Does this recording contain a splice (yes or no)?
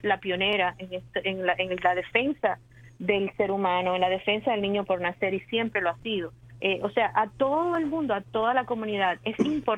yes